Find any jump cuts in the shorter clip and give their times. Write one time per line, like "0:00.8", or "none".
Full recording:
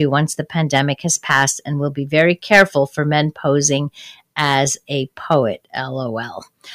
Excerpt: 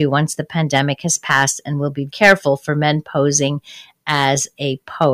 0:02.1